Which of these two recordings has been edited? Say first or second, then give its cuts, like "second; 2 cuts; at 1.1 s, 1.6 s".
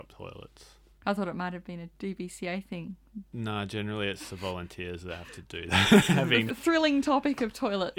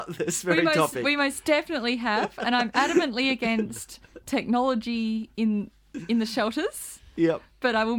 first; 1 cut; at 6.5 s